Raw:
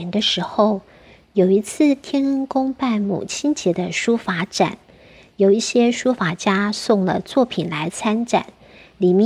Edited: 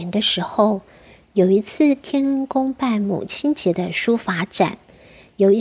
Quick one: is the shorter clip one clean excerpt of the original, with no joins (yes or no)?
yes